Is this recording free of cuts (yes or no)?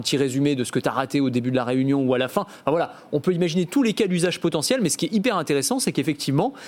yes